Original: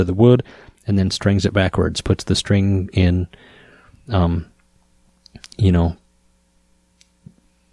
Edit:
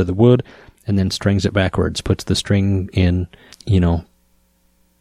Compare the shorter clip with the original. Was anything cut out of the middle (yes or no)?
yes